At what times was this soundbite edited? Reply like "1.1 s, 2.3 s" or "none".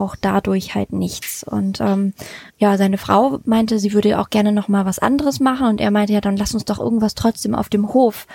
2.5 s